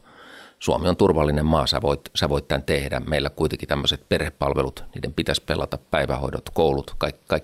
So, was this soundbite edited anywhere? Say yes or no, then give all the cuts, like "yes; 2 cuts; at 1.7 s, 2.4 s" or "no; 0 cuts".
no; 0 cuts